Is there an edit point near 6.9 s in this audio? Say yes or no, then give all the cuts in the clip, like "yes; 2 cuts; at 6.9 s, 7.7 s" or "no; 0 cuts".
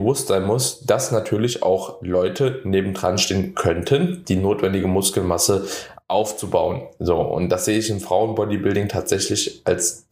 no; 1 cut; at 4.2 s